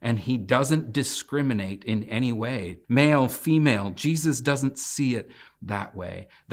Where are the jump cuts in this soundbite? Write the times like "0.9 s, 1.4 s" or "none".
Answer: 2.8 s